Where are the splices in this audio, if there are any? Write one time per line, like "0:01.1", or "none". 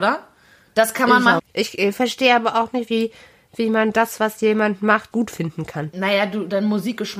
0:01.4
0:05.1